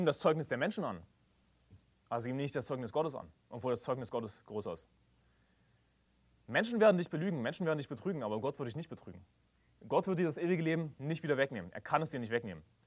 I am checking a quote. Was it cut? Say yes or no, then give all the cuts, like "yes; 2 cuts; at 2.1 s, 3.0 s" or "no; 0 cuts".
no; 0 cuts